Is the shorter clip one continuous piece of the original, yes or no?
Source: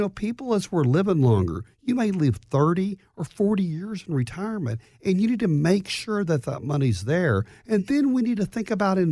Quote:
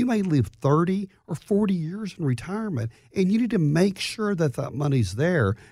yes